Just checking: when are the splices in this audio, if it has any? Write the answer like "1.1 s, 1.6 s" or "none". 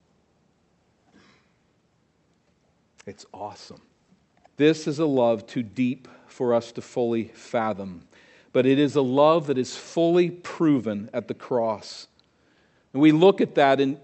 4.5 s

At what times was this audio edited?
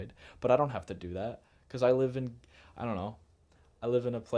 none

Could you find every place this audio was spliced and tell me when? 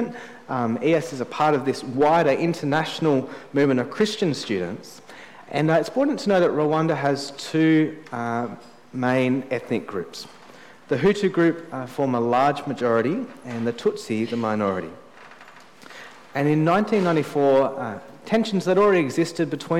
5.4 s

